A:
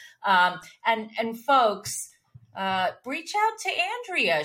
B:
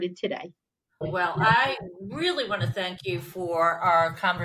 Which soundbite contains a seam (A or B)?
B